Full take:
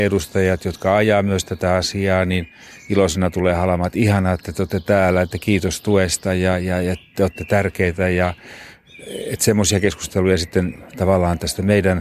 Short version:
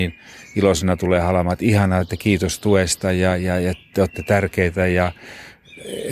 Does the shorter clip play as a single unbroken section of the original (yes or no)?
no